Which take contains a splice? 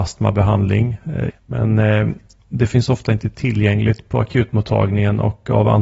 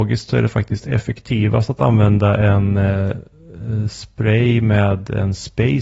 first; 1 cut; at 1.3 s

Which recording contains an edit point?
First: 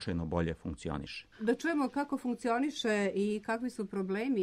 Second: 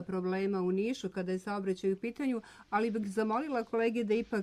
first; 1 cut; at 1.3 s

